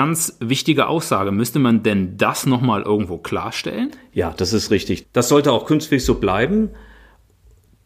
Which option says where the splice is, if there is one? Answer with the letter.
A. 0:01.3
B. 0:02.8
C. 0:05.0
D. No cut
C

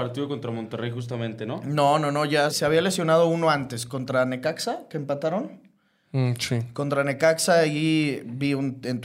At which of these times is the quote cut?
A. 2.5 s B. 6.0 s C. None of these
A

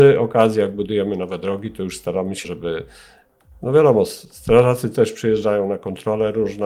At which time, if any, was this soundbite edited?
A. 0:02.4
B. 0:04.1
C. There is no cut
A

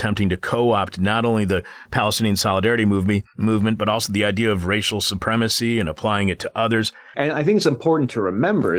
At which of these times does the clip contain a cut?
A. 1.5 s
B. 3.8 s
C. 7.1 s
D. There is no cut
C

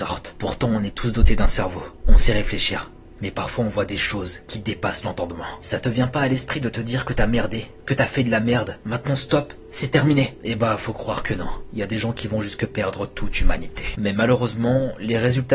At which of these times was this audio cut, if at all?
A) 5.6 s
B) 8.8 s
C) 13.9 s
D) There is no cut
C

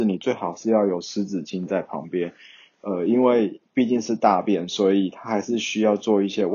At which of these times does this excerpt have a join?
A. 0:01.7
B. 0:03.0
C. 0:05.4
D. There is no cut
D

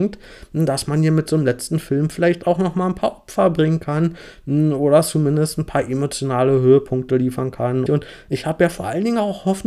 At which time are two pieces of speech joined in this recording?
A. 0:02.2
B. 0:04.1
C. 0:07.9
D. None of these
C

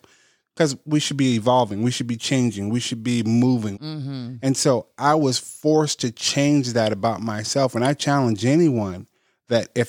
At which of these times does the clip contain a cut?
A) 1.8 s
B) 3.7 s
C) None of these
B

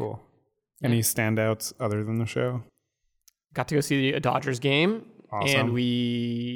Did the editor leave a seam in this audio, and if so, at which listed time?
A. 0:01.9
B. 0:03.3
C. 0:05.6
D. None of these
D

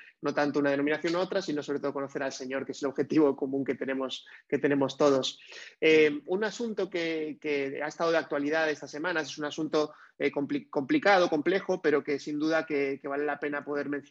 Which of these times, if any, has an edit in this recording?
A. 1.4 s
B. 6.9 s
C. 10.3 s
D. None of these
D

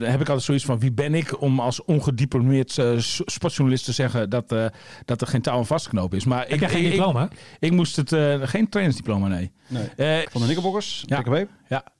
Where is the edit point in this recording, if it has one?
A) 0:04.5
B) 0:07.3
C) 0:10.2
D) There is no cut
C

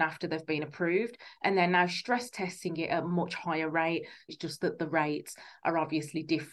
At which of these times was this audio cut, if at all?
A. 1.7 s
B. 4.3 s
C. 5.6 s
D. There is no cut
B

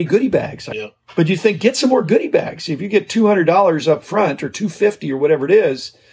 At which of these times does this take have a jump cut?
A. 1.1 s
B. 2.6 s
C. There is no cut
C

